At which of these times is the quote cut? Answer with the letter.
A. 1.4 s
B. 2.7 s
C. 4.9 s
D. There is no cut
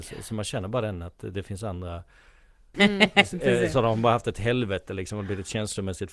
B